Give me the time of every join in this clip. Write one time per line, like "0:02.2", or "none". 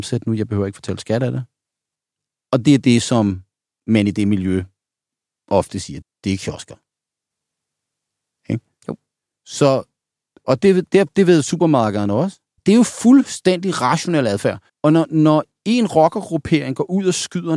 0:06.0
0:12.6
0:14.7

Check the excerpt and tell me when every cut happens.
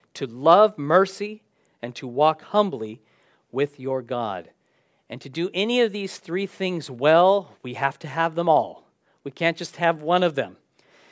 none

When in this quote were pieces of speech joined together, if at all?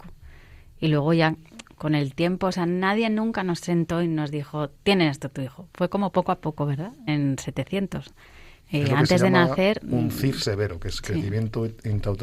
0:07.1
0:08.6

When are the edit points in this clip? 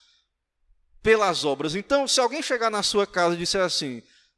none

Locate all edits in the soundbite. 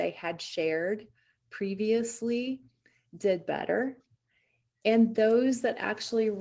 none

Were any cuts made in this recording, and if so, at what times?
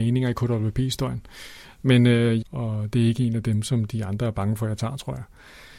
0:02.4

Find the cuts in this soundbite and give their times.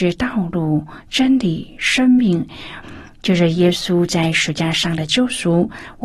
0:02.8

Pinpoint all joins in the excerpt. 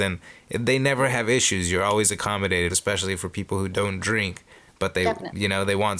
0:02.7

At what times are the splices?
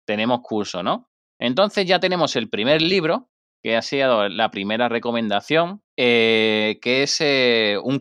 0:05.9

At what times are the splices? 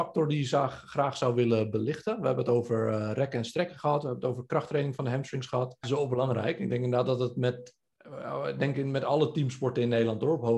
0:05.8

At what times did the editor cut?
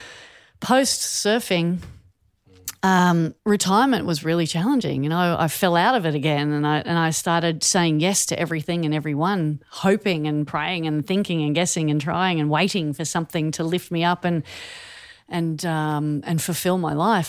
0:03.4

